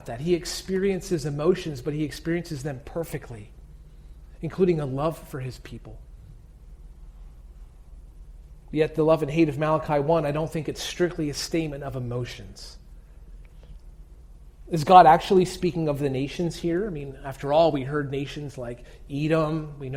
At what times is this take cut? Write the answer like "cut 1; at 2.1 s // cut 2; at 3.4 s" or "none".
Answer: none